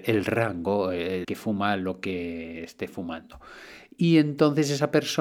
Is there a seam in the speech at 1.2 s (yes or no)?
yes